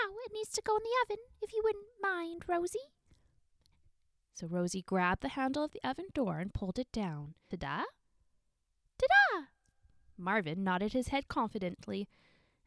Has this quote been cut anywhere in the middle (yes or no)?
yes